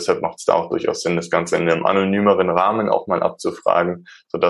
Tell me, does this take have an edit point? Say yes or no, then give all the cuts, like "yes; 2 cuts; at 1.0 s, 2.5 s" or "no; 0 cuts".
no; 0 cuts